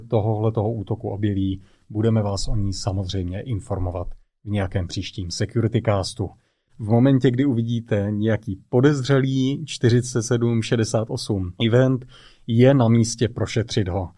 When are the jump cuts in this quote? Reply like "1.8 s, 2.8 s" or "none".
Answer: 6.7 s, 11.6 s